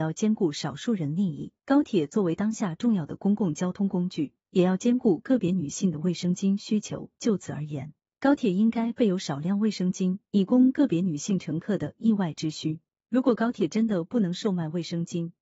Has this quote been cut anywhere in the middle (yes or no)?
yes